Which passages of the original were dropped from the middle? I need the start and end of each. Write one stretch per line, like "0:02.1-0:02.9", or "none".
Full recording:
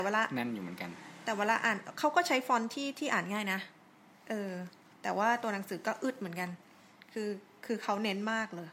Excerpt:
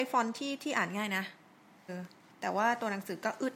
0:04.2-0:04.5